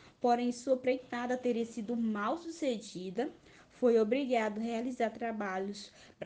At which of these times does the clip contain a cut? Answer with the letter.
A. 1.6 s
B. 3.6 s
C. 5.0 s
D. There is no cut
D